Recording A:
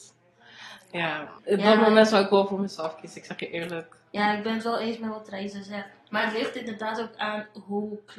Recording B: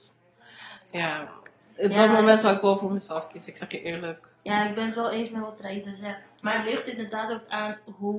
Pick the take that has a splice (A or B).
A